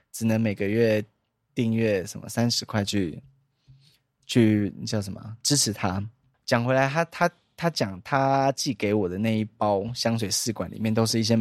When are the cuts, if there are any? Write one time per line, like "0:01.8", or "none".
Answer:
0:06.3